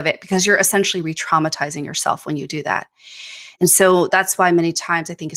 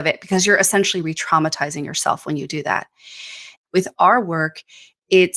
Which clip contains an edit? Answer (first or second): second